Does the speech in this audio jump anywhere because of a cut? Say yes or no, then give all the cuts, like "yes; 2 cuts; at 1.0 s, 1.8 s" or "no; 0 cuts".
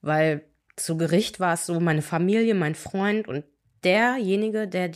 no; 0 cuts